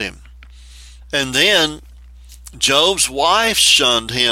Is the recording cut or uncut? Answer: cut